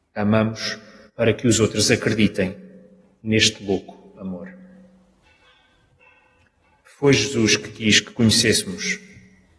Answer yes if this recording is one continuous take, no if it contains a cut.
yes